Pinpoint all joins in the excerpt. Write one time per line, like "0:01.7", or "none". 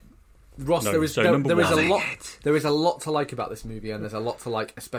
none